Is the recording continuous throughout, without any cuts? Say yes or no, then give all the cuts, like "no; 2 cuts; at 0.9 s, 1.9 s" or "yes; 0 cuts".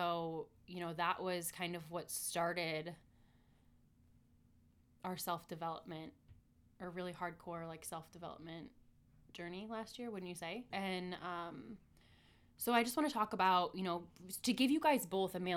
no; 1 cut; at 10.7 s